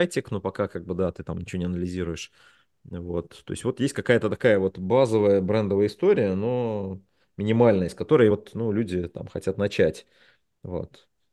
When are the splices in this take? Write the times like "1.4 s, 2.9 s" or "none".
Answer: none

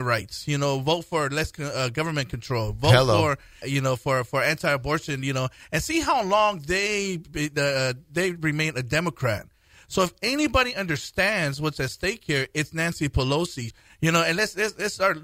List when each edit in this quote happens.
3.6 s, 13.7 s

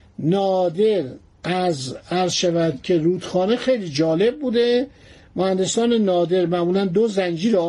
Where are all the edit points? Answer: none

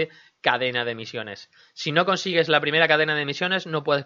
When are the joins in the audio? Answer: none

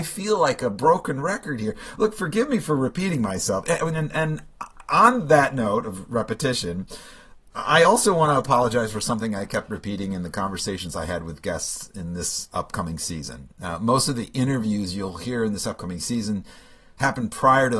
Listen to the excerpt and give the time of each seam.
none

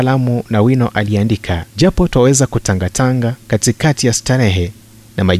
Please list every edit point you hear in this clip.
1.7 s, 3.4 s

